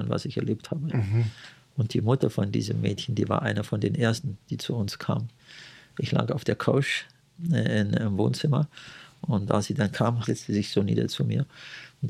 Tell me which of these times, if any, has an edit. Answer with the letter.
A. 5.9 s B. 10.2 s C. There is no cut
B